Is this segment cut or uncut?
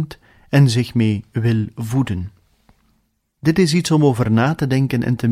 cut